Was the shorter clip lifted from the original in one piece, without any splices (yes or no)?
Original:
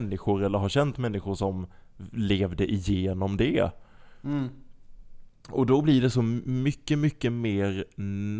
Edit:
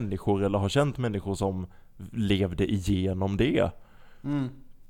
yes